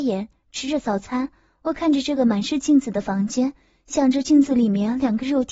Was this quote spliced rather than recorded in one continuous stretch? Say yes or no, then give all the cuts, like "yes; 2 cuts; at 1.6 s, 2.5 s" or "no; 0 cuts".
no; 0 cuts